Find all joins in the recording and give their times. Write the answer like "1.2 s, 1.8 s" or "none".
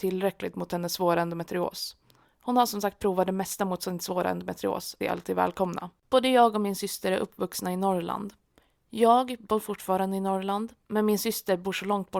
2.2 s, 5.0 s